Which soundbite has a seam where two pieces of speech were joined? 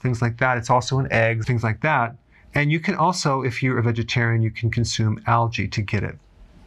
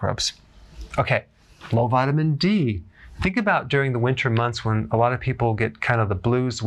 first; 1 cut; at 1.4 s

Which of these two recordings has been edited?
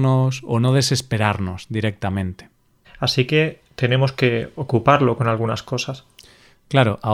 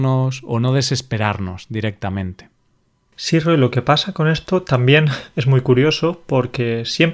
first; 1 cut; at 2.8 s

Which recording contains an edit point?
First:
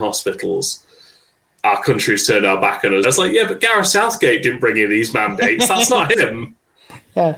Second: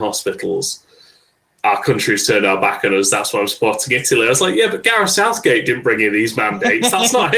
first; 1 cut; at 3.0 s

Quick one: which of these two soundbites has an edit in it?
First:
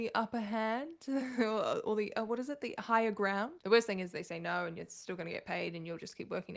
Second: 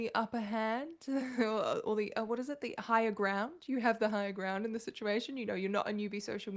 first; 1 cut; at 3.6 s

